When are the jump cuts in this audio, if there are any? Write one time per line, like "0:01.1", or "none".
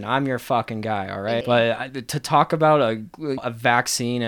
0:01.4
0:03.4